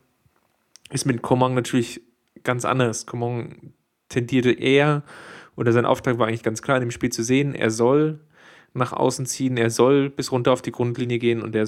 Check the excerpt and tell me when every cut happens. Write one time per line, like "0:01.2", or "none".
none